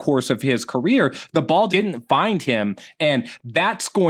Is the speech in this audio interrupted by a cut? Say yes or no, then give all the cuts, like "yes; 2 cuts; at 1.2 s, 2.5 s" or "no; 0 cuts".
yes; 1 cut; at 1.7 s